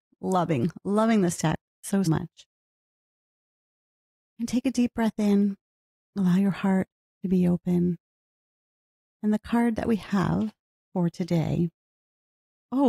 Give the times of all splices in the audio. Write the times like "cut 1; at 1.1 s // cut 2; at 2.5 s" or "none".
cut 1; at 2.1 s